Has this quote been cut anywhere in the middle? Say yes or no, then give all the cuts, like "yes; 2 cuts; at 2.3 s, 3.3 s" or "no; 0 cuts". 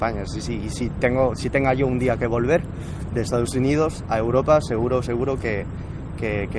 no; 0 cuts